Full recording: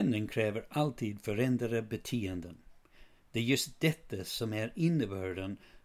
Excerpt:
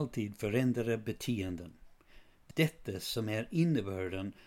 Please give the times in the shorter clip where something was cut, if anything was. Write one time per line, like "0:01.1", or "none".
0:02.5